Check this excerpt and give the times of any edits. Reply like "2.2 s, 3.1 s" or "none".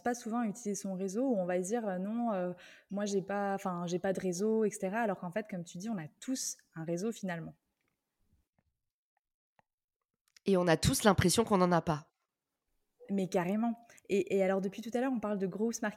none

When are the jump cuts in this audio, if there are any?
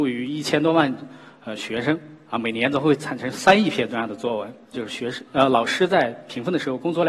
4.7 s

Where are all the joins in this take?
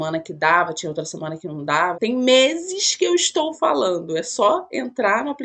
1.9 s

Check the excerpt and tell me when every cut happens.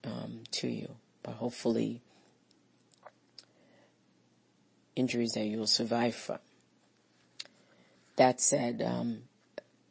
none

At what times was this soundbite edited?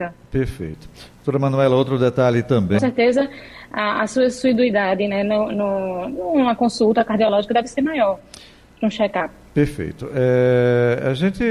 2.8 s

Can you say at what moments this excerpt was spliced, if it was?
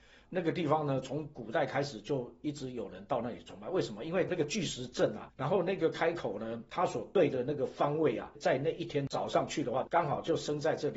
5.3 s, 9.8 s

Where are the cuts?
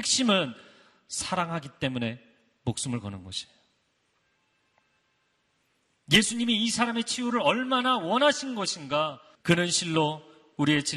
9.3 s

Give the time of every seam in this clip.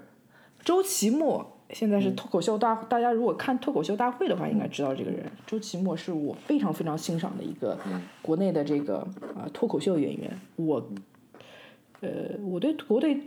none

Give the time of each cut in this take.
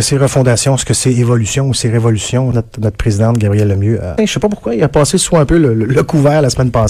2.5 s, 4.2 s

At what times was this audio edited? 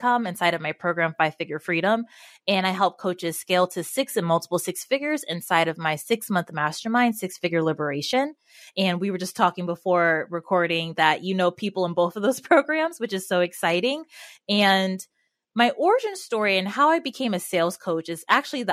none

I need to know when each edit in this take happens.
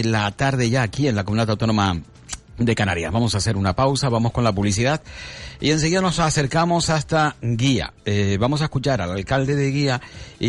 none

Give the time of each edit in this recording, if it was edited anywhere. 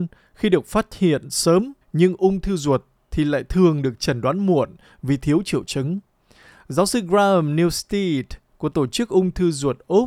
1.8 s

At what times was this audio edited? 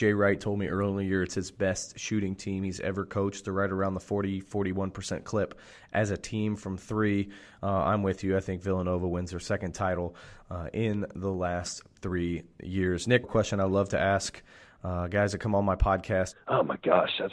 13.2 s, 16.3 s

